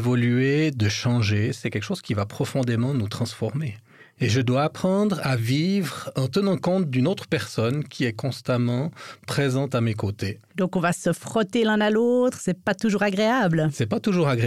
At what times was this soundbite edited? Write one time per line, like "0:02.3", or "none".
0:04.2
0:10.5

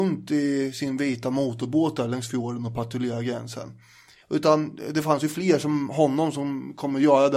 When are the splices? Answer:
0:04.2

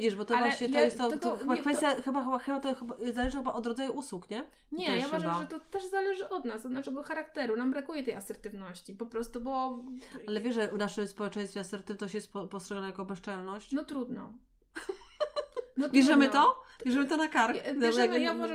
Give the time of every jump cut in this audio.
none

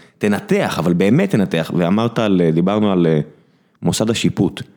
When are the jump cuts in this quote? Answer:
none

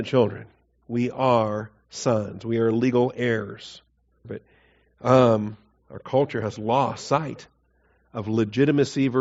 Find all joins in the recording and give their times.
0:04.2

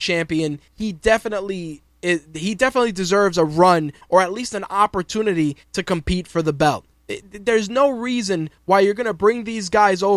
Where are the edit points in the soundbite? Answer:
none

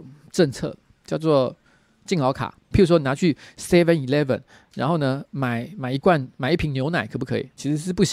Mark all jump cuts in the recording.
0:02.7

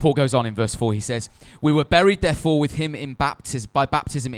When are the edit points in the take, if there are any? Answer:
none

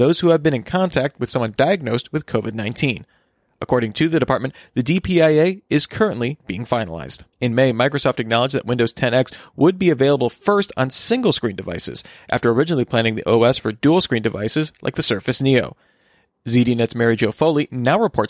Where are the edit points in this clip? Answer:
0:07.3

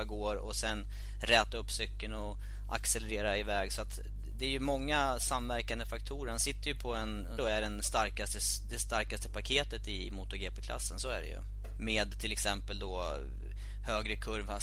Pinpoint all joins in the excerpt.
0:07.4
0:11.8

